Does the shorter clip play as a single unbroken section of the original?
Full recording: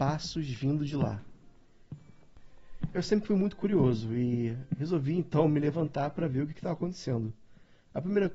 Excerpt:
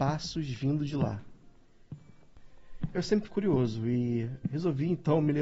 no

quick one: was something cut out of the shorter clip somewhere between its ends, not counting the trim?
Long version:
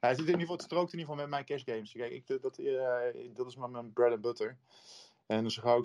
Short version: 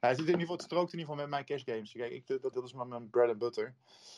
yes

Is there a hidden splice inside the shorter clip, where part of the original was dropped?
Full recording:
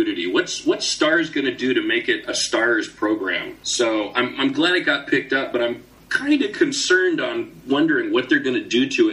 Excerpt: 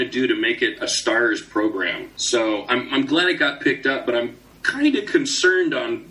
no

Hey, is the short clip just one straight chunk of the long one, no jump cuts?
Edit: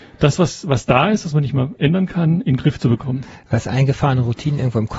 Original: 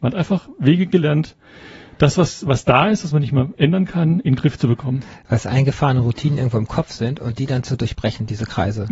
yes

